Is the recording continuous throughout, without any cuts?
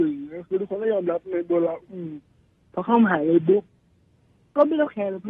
no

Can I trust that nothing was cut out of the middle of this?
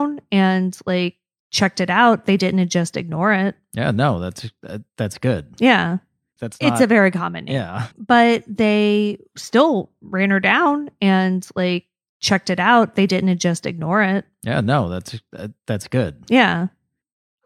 no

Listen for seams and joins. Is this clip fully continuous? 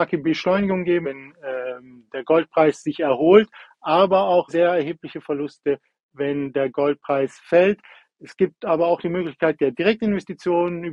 no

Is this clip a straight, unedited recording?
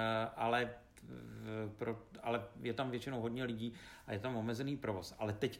yes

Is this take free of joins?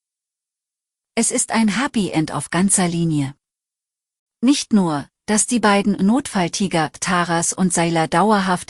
yes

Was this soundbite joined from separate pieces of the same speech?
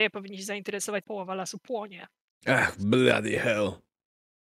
yes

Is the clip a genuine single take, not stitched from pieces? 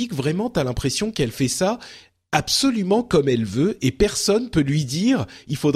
yes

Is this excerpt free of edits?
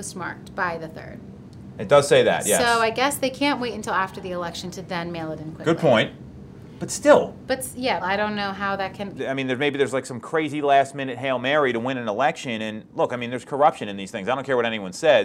no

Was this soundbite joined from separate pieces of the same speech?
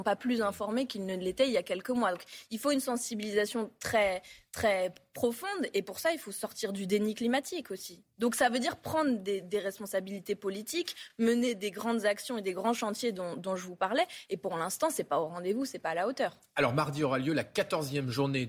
no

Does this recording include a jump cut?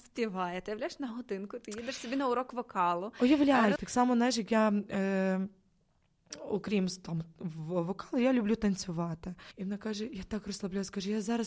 yes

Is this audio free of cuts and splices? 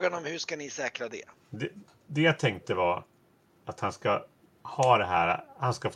yes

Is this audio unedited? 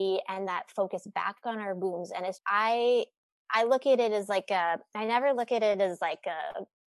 no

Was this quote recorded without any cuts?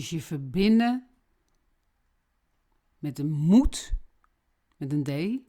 yes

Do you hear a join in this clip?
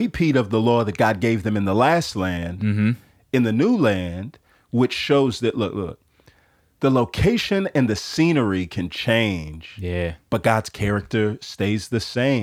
no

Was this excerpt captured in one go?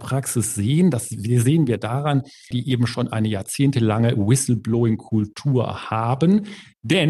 no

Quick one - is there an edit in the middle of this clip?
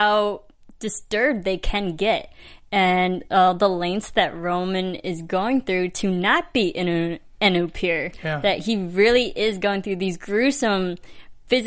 no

